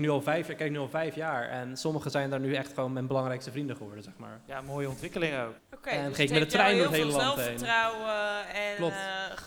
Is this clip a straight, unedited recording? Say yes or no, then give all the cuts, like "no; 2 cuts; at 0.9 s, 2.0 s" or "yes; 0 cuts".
no; 2 cuts; at 4.5 s, 5.6 s